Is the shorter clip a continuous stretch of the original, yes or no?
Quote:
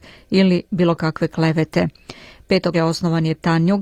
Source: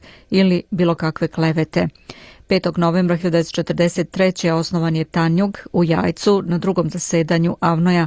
no